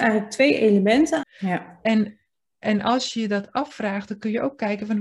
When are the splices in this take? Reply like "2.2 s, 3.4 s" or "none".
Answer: 1.2 s